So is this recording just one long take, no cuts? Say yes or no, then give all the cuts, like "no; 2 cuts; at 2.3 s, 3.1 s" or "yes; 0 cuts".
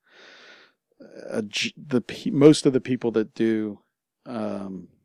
yes; 0 cuts